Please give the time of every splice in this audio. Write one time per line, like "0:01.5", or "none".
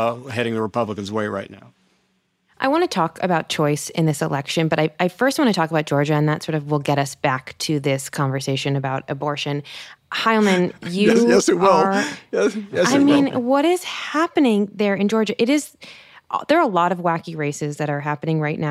none